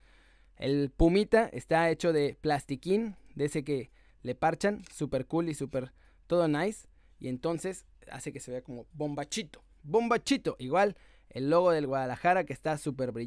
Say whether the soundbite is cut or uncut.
uncut